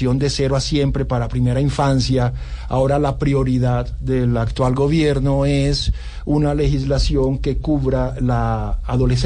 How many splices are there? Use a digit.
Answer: 0